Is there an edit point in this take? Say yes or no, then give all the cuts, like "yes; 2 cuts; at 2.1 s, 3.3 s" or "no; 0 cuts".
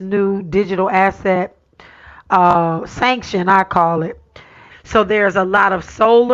yes; 1 cut; at 4.7 s